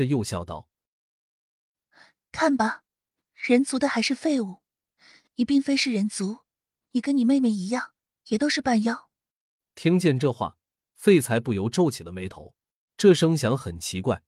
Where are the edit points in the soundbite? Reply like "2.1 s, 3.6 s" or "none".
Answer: 12.9 s